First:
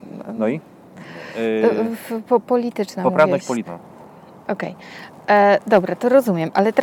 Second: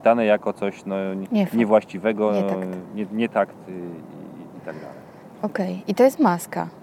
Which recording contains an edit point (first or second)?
first